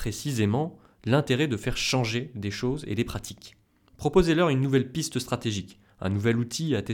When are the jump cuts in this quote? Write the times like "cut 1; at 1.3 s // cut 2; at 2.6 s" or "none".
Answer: none